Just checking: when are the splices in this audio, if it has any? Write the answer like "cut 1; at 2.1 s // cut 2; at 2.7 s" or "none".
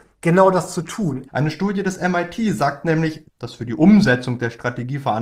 cut 1; at 1.3 s // cut 2; at 3.2 s